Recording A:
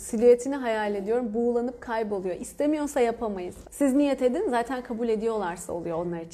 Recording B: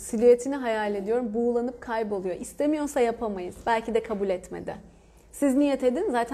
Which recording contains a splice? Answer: A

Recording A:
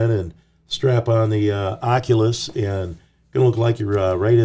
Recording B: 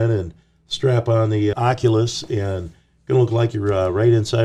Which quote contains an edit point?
B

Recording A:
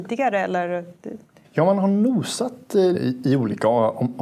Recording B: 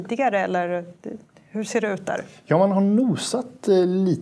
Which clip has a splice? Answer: A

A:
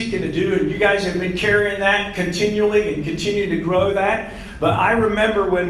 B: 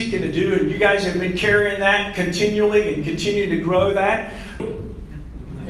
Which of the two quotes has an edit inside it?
B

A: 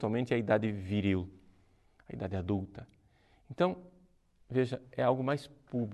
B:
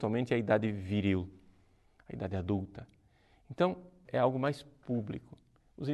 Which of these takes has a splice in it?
B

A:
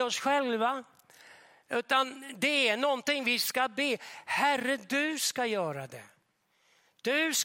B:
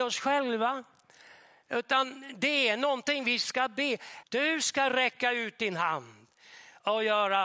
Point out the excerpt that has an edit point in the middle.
B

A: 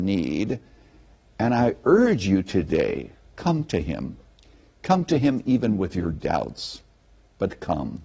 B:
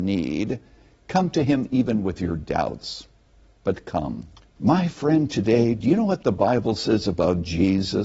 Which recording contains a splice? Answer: B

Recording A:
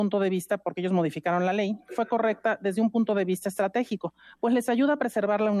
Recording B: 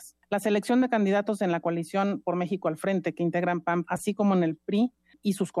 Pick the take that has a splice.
B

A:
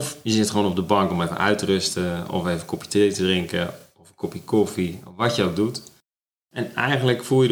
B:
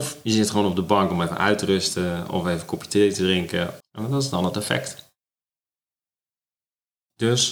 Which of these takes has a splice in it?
B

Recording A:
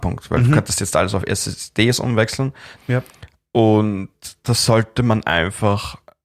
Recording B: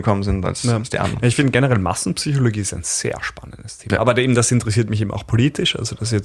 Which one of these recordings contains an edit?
A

